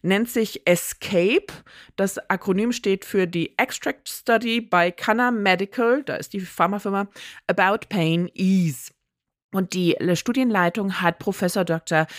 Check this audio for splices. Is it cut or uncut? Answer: uncut